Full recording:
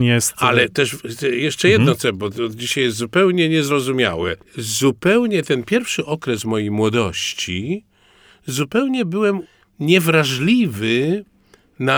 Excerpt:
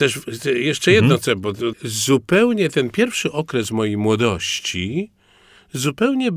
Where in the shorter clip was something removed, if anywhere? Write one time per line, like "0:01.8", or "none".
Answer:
0:01.7